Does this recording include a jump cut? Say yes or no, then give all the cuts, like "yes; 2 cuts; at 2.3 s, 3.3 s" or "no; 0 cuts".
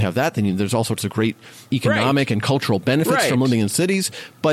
no; 0 cuts